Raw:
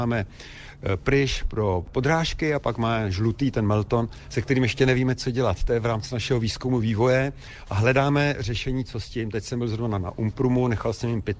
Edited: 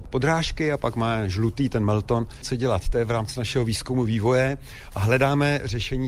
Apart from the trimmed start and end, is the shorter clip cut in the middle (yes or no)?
yes